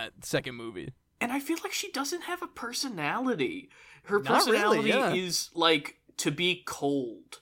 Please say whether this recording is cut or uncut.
uncut